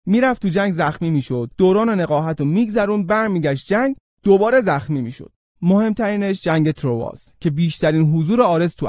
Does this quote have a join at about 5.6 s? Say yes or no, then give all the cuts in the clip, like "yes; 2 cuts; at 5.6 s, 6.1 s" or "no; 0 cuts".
yes; 1 cut; at 5.6 s